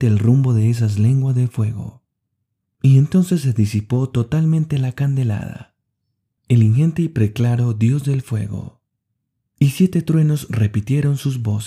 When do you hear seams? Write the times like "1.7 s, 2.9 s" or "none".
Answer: 6.3 s, 9.4 s

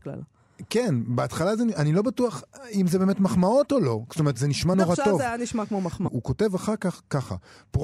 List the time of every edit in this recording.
4.7 s, 6.1 s

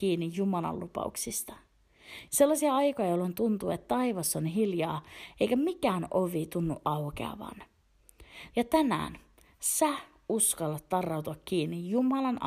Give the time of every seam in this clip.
2.3 s, 8.5 s

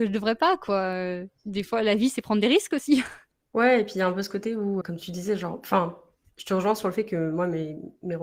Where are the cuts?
4.8 s

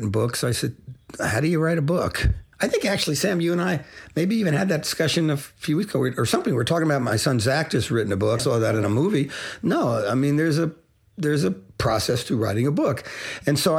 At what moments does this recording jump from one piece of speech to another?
2.5 s, 8.4 s

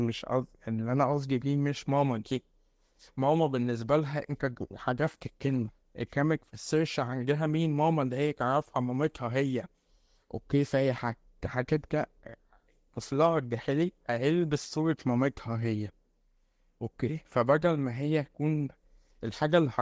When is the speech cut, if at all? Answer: none

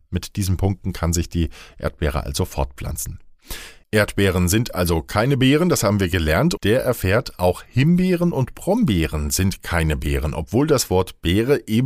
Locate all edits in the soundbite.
6.6 s

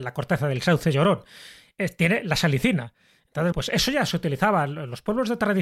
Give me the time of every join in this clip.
3.5 s

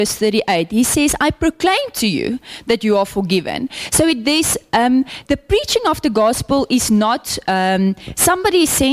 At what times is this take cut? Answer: 5.2 s

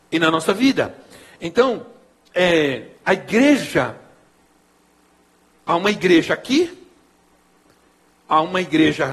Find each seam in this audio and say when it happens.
none

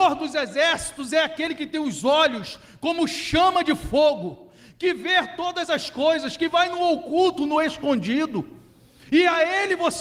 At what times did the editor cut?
none

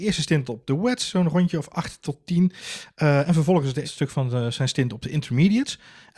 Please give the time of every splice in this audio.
3.8 s

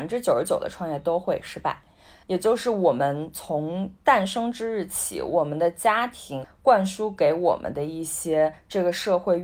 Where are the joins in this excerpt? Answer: 2.2 s, 6.4 s

